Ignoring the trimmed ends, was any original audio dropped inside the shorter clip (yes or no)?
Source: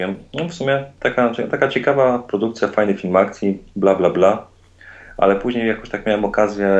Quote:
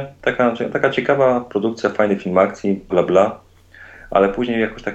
yes